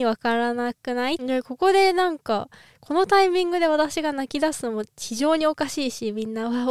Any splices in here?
yes; 1 cut; at 1.2 s

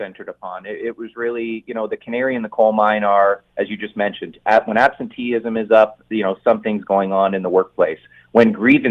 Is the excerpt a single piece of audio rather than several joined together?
yes; 0 cuts

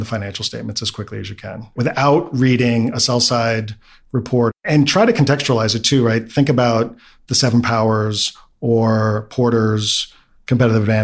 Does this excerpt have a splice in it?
no; 0 cuts

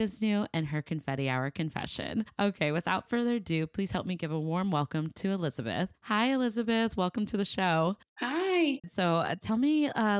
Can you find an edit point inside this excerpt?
yes; 1 cut; at 8.8 s

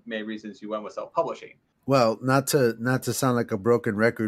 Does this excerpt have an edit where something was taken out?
yes; 1 cut; at 1.7 s

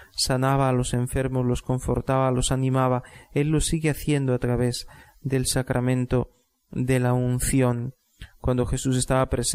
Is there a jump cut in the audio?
no; 0 cuts

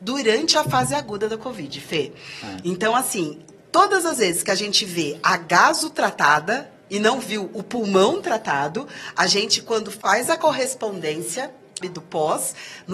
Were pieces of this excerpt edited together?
yes; 1 cut; at 11.8 s

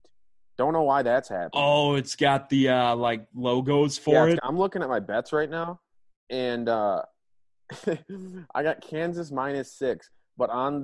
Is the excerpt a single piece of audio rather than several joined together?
no; 1 cut; at 4.4 s

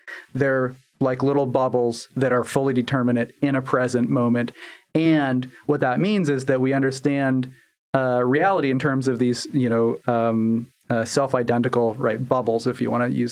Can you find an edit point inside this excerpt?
no; 0 cuts

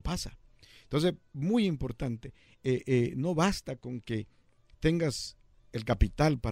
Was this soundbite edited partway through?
no; 0 cuts

